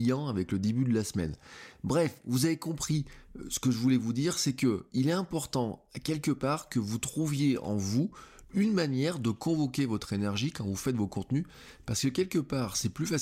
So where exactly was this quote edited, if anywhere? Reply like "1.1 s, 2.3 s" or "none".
none